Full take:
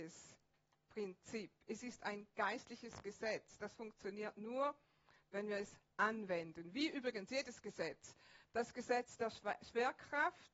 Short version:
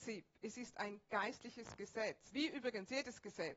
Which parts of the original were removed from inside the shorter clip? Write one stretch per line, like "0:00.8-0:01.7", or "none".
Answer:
0:03.6-0:06.7